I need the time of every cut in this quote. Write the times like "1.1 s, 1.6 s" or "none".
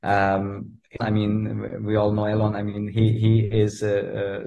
1.0 s